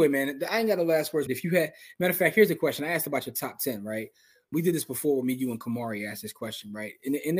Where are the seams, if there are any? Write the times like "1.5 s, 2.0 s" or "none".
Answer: 1.3 s, 4.5 s

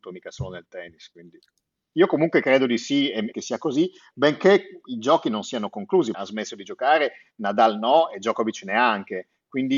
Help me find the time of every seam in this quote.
1.9 s, 3.3 s, 6.1 s

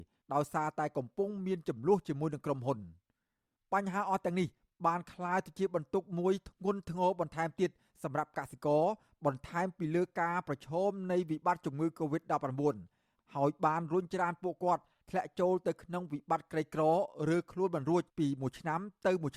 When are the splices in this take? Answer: 18.1 s

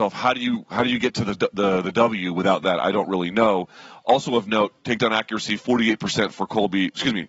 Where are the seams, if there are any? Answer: none

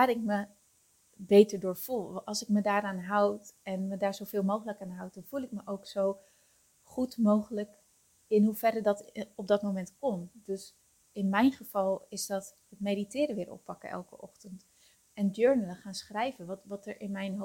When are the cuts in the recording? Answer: none

